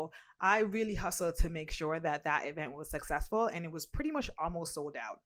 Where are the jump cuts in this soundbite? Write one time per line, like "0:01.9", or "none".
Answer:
none